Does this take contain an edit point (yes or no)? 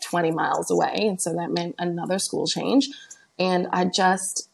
no